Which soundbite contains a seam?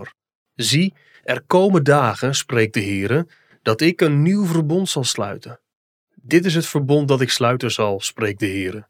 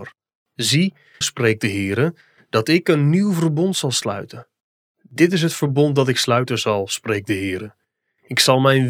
second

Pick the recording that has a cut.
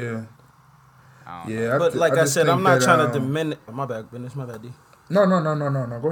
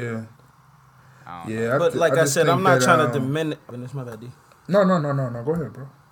second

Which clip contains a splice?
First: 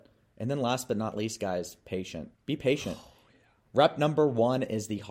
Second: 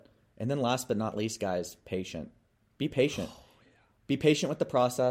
first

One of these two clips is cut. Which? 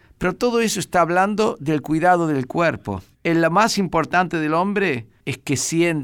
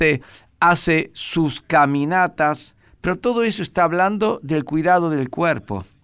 first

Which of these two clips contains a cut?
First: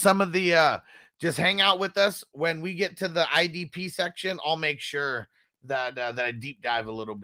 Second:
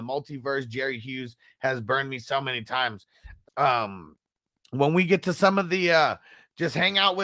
second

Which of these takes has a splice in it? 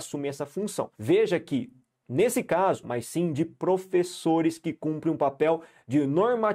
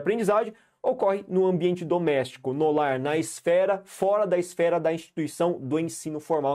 first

